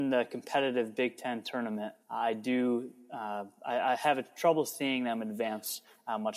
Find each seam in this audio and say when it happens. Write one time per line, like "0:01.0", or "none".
0:02.0